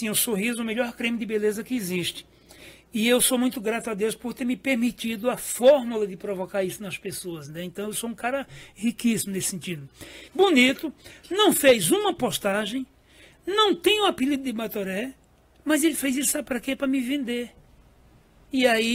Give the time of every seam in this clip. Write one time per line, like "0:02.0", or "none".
0:10.3